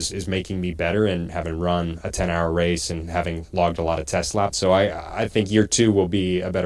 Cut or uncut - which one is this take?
cut